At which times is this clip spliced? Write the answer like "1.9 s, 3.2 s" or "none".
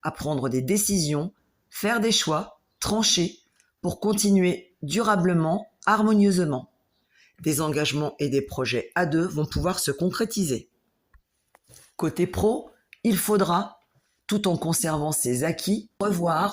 none

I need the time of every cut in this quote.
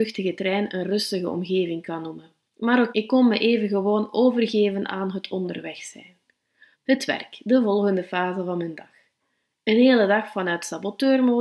2.9 s, 6.7 s

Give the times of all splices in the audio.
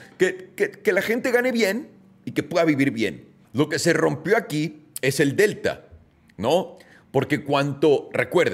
3.4 s

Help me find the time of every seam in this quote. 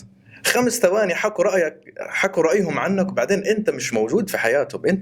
none

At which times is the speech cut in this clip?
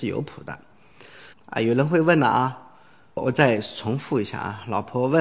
1.3 s

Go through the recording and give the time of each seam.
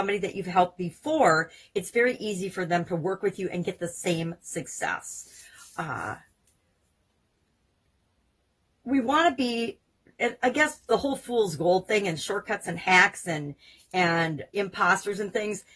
14.5 s

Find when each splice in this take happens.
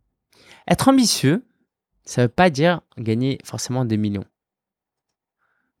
none

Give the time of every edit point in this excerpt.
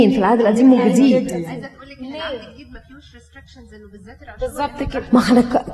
none

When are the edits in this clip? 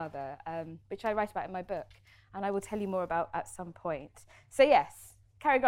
none

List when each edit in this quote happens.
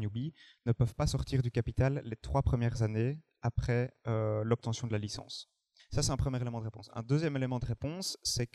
5.8 s

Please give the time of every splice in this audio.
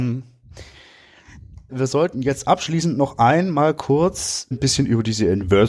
1.7 s, 4.5 s

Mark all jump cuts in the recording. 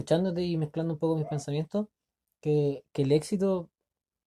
none

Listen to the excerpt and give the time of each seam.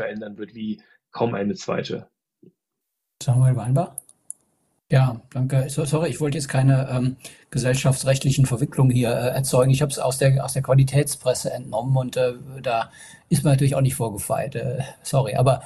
3.1 s, 4.8 s

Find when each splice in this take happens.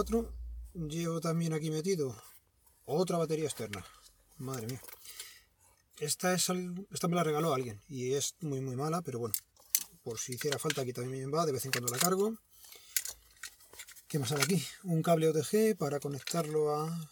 none

